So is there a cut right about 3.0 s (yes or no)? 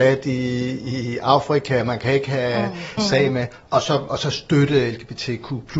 yes